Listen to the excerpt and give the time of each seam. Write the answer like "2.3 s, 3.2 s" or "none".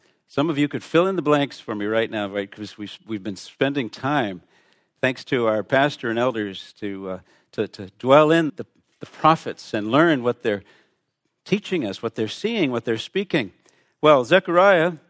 8.5 s